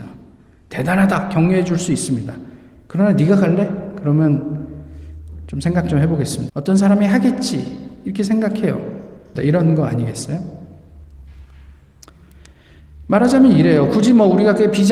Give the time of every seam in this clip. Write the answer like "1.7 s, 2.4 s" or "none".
6.5 s, 9.3 s